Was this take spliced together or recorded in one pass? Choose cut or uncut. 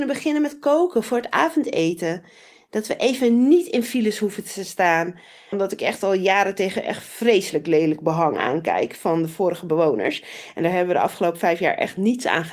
cut